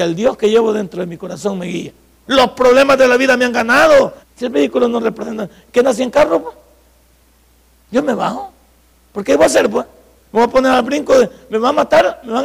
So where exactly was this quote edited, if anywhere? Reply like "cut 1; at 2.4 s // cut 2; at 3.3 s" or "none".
cut 1; at 2.3 s // cut 2; at 4.2 s